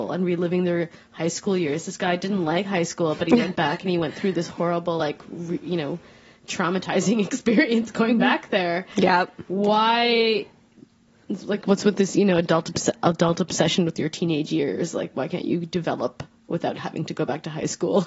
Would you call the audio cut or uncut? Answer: uncut